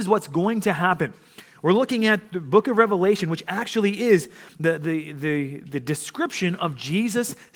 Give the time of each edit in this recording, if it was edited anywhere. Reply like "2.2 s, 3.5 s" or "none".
none